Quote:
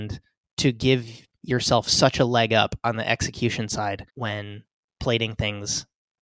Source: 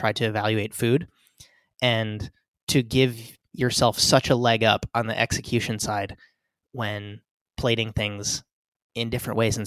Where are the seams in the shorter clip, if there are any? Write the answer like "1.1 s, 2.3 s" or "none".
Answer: 4.1 s